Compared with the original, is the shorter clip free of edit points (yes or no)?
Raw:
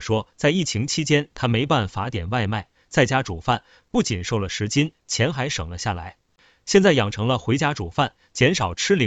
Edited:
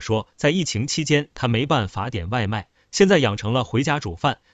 no